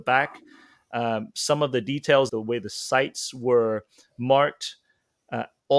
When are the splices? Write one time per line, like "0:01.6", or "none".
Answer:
0:02.3